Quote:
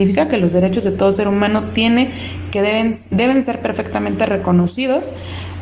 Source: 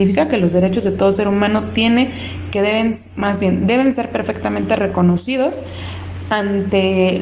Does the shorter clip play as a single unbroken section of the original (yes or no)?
no